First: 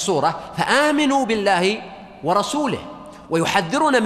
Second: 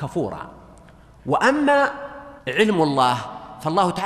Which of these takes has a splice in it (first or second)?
second